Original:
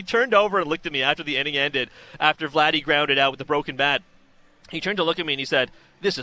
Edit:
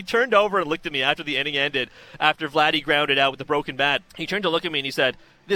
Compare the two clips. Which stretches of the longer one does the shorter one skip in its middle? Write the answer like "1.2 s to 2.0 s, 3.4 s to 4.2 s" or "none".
4.1 s to 4.6 s